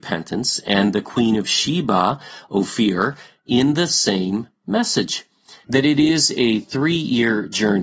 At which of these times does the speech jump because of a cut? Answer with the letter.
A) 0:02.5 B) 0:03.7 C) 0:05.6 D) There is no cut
C